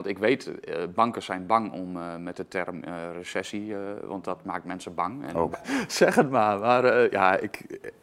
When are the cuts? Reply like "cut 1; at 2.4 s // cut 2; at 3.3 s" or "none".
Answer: cut 1; at 5.5 s